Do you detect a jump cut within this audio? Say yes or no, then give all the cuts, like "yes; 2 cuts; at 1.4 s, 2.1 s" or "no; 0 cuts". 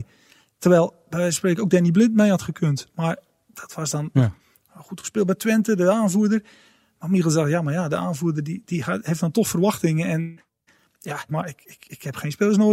yes; 2 cuts; at 4.1 s, 11.3 s